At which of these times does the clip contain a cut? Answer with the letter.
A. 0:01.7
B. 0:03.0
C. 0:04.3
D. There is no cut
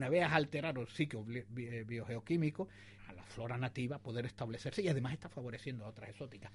B